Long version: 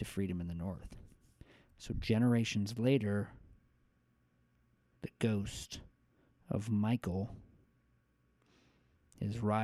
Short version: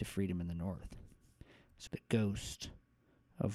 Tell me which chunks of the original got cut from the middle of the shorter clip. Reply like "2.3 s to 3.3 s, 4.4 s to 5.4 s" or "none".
1.9 s to 5.0 s